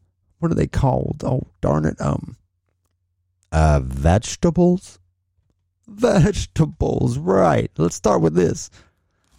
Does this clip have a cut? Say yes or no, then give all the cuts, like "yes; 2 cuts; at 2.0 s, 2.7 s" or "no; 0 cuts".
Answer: no; 0 cuts